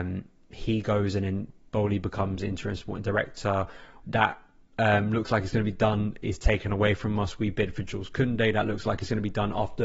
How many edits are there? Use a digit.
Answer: 1